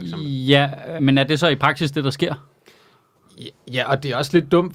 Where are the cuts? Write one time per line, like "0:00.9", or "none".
none